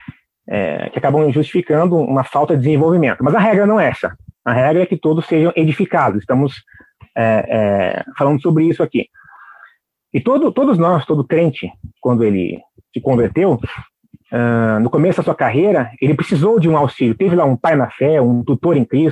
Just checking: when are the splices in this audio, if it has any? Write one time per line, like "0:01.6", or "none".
none